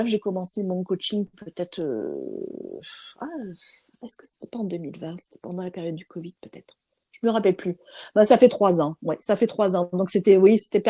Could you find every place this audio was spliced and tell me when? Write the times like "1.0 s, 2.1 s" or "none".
none

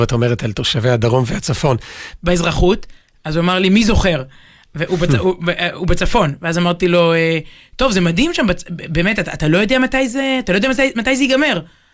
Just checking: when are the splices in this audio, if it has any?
2.2 s

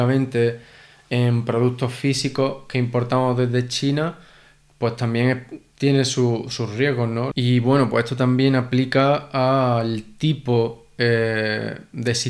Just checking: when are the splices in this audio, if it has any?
7.3 s

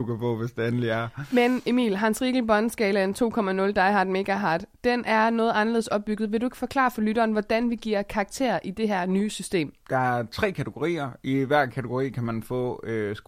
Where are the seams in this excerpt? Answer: none

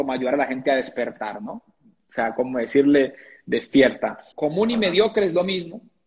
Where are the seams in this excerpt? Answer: 4.3 s

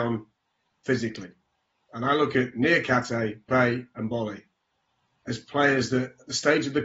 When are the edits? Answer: 3.5 s

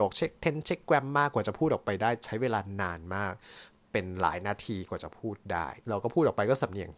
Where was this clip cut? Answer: 5.8 s

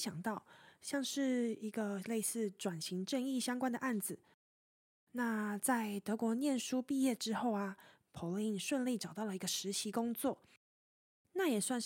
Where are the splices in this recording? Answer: 5.0 s

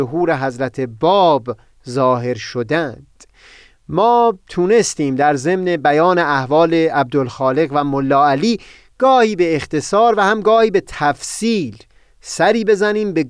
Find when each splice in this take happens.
none

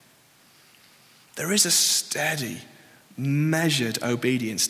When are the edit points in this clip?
none

